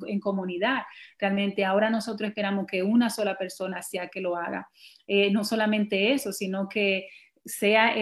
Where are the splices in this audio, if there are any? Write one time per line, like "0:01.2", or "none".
none